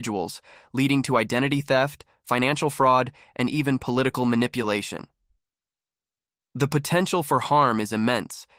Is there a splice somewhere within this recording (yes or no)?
no